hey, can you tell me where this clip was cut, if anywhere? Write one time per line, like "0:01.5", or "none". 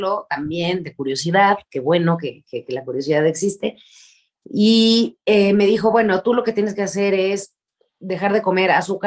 none

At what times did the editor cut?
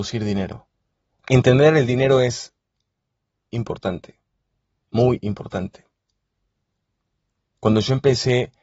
0:01.1
0:03.5

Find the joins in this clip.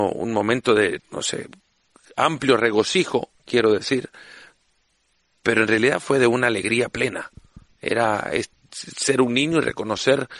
0:01.0

